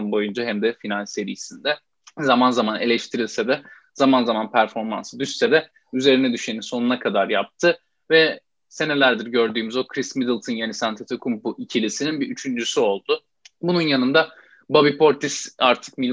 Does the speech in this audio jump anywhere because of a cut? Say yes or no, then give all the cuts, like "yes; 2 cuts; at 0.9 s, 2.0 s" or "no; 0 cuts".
no; 0 cuts